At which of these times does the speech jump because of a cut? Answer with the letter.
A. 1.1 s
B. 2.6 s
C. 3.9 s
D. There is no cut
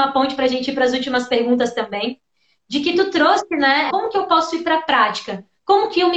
C